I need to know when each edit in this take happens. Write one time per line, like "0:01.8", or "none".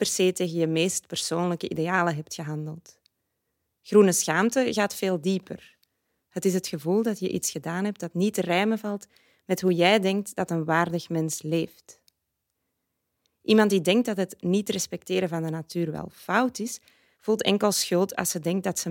0:17.1